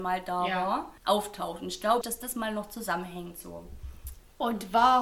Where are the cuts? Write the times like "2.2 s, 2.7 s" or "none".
1.0 s, 2.0 s